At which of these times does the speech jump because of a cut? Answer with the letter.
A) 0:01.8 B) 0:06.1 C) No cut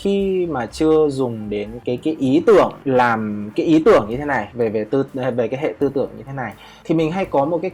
A